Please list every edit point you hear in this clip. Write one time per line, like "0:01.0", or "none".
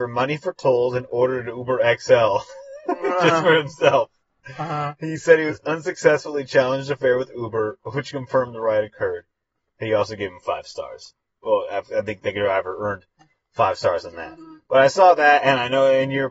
none